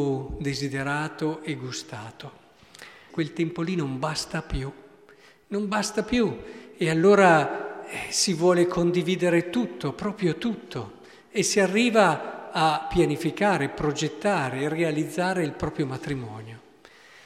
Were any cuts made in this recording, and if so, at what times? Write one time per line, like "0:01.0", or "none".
0:03.1